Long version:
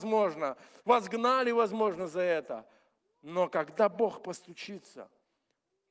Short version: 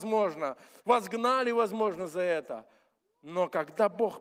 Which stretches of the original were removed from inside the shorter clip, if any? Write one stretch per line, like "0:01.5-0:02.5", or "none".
none